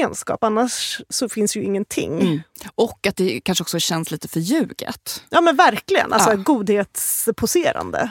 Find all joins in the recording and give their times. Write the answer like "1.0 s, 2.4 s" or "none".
none